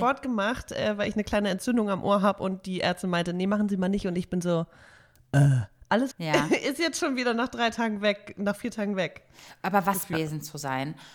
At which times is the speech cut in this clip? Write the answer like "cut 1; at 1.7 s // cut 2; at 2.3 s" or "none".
cut 1; at 6.1 s // cut 2; at 10.1 s